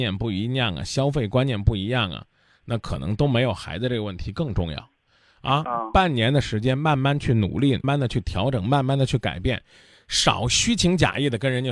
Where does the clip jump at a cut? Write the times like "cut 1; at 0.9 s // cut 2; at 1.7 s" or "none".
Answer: cut 1; at 7.8 s

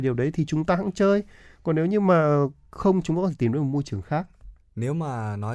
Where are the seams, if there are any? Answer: cut 1; at 4.6 s

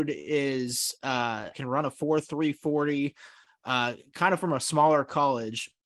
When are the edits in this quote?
cut 1; at 1.5 s

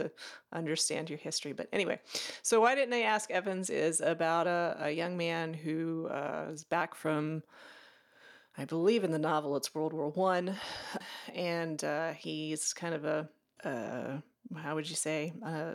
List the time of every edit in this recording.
none

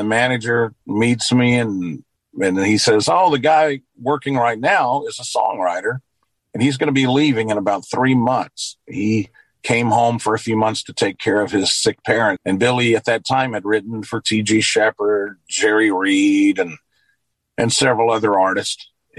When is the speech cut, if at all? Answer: cut 1; at 12.4 s

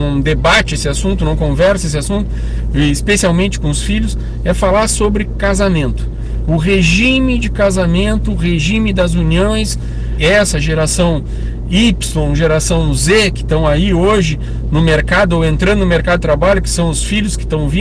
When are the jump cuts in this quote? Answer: cut 1; at 10.2 s

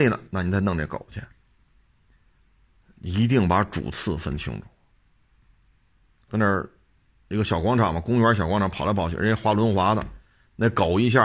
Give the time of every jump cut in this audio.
cut 1; at 6.3 s

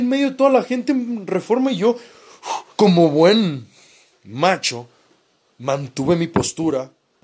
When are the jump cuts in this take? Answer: cut 1; at 2.7 s

